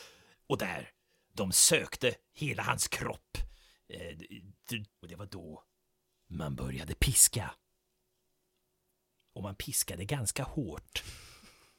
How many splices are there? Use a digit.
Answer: 1